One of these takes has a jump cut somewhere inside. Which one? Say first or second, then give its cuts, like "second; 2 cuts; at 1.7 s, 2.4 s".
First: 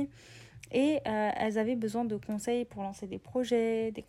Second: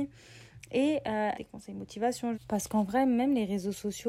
second; 2 cuts; at 1.3 s, 2.3 s